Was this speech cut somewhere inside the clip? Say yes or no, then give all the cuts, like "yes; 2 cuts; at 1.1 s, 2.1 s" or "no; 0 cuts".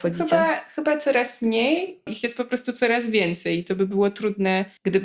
yes; 1 cut; at 2.1 s